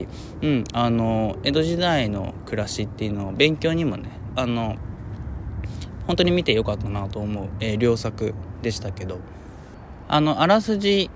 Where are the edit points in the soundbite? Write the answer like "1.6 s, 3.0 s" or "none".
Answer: 4.3 s